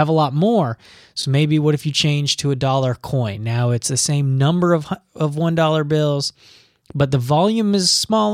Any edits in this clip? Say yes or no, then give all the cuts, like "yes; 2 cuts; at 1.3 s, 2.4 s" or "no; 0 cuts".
no; 0 cuts